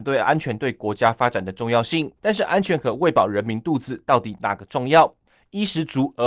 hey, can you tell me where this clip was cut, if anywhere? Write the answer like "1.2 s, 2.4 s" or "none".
2.2 s